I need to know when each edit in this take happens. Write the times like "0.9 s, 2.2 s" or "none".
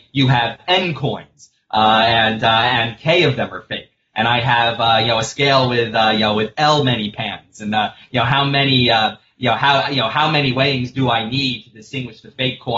none